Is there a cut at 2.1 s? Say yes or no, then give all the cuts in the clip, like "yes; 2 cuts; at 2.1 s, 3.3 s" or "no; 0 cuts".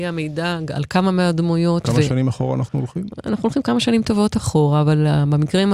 no; 0 cuts